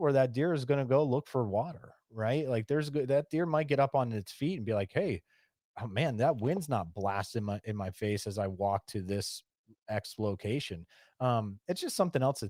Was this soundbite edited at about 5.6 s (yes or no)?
no